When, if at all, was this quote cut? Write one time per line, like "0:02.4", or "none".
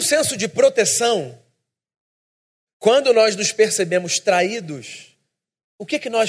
none